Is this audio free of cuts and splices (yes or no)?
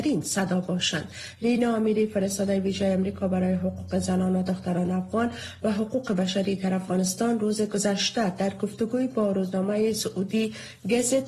yes